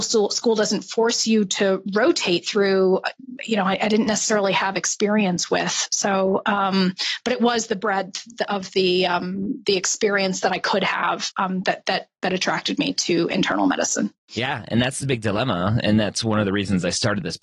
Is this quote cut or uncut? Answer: uncut